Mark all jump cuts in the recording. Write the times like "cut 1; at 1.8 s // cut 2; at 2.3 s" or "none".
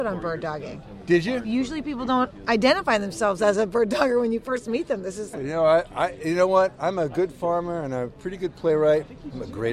cut 1; at 5.3 s